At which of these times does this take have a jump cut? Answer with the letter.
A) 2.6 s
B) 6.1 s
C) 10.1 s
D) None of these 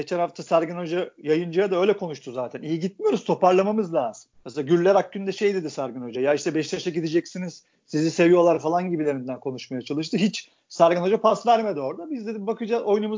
D